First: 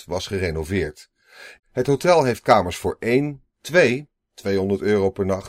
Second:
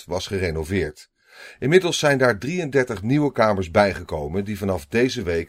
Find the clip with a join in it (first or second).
first